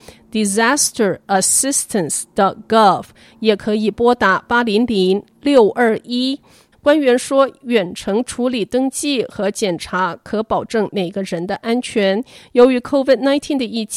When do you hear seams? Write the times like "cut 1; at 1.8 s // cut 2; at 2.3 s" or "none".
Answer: cut 1; at 6.7 s